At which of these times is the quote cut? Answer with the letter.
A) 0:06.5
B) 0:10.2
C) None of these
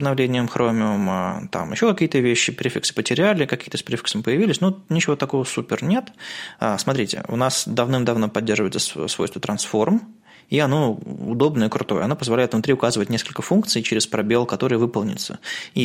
A